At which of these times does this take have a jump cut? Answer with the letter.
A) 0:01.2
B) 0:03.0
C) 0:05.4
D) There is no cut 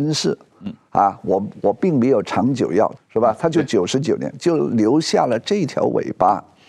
B